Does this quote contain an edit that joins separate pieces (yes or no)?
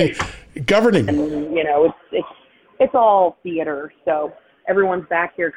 yes